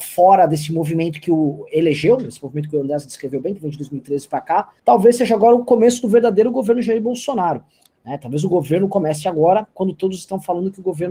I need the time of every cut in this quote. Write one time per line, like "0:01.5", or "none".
0:04.8